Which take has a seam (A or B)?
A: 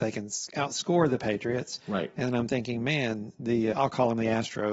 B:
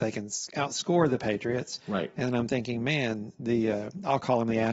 A